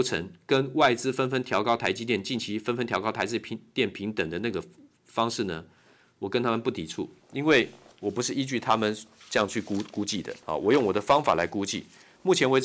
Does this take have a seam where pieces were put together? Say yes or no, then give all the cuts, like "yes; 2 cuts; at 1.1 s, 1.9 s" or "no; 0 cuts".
no; 0 cuts